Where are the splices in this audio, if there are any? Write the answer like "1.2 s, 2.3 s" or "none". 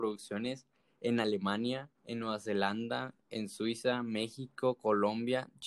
1.9 s